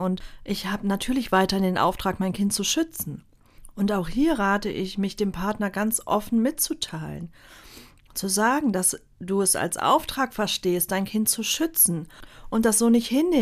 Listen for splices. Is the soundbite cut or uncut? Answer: uncut